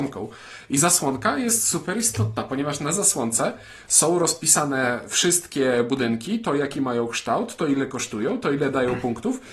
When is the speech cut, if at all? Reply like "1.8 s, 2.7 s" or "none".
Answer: none